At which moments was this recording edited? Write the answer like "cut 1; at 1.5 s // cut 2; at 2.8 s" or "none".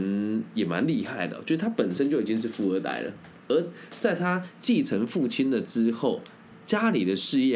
none

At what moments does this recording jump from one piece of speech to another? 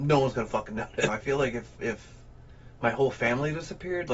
cut 1; at 1.1 s

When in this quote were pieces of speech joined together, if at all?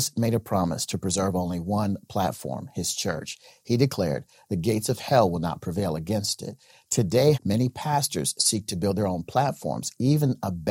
cut 1; at 7.3 s

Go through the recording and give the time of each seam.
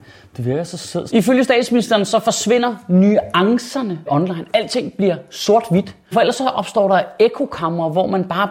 cut 1; at 1.1 s // cut 2; at 4.1 s // cut 3; at 6.1 s

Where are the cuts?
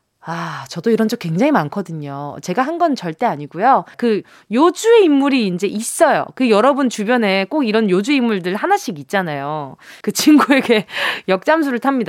cut 1; at 3.9 s // cut 2; at 10.0 s

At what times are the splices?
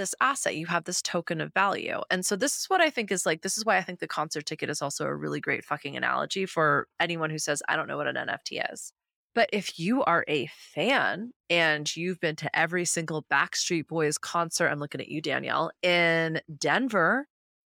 cut 1; at 9.1 s

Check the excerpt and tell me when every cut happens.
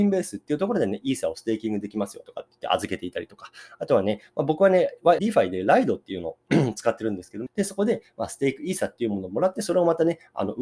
cut 1; at 5.2 s // cut 2; at 7.5 s

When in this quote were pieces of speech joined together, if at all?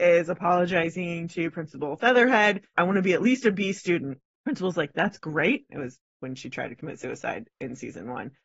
cut 1; at 2.8 s // cut 2; at 5.7 s

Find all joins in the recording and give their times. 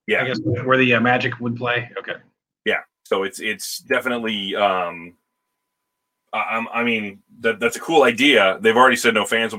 cut 1; at 2.9 s

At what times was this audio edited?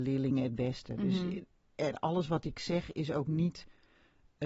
none

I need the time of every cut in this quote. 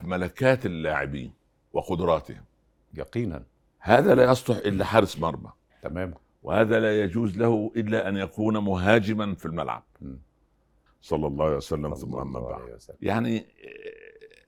cut 1; at 10.9 s // cut 2; at 12.9 s

